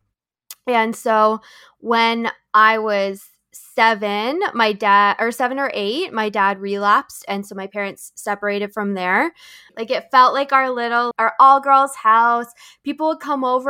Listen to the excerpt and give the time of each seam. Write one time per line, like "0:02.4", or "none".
0:09.7
0:11.1